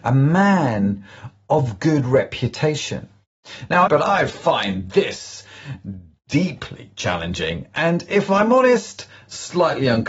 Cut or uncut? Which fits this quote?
cut